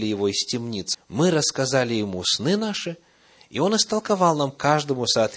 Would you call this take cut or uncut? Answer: cut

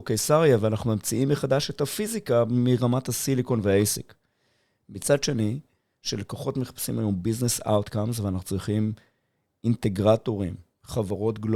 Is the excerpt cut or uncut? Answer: uncut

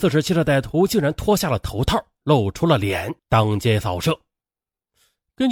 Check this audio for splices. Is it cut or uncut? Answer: uncut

